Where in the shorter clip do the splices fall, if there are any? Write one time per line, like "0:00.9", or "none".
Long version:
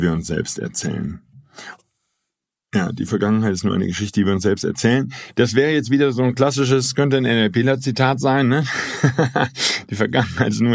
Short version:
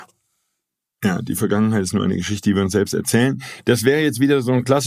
none